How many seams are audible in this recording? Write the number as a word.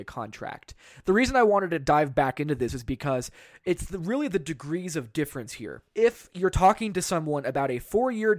one